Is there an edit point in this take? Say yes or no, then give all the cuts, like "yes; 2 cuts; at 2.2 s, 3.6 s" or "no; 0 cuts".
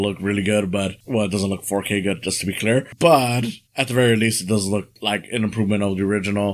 yes; 1 cut; at 3.7 s